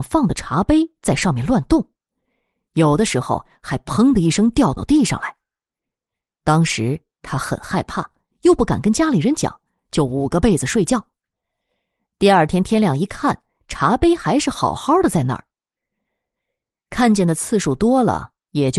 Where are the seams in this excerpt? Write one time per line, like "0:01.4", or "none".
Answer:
none